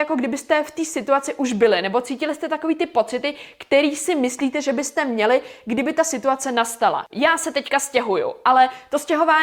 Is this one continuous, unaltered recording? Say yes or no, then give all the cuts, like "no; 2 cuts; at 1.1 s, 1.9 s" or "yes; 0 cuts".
no; 1 cut; at 7.1 s